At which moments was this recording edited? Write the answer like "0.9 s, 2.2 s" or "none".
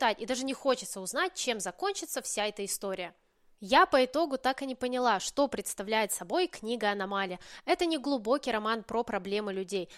none